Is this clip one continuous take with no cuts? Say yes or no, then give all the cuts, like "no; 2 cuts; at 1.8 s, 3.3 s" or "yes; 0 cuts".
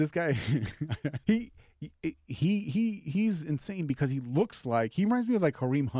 no; 1 cut; at 1.2 s